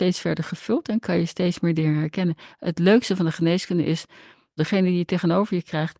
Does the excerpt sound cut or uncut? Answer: cut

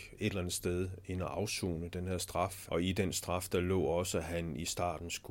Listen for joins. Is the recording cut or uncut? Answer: cut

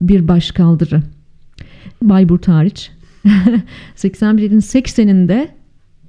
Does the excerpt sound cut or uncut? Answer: cut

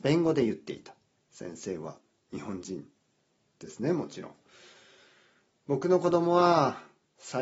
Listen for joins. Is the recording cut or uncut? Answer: cut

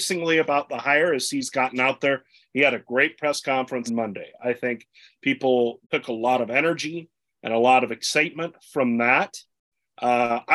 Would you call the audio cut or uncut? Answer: cut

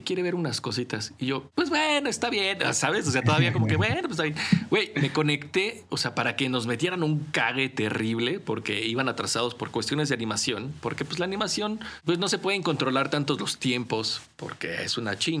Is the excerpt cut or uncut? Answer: uncut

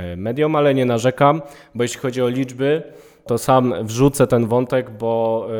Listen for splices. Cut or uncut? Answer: cut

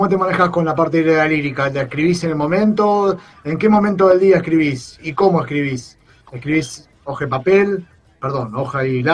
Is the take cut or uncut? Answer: uncut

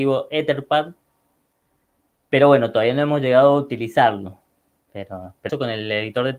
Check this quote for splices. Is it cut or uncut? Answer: cut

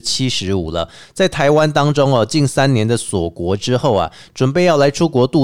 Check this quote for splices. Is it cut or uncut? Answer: uncut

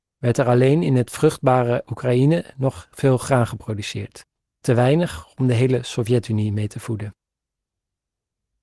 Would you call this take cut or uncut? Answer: uncut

